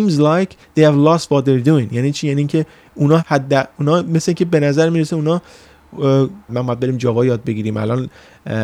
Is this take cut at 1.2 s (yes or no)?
no